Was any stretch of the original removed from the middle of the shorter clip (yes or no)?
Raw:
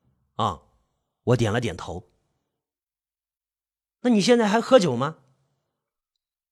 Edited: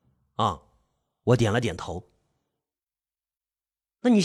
no